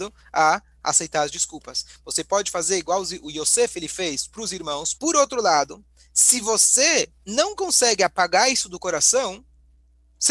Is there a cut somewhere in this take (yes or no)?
yes